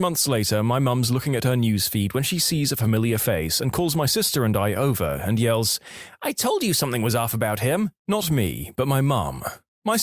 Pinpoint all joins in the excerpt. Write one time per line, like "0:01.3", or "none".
0:08.0